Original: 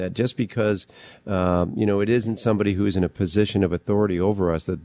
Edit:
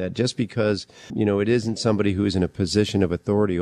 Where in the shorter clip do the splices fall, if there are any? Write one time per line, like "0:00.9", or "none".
0:01.1